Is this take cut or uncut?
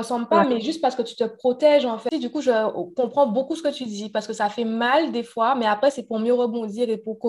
cut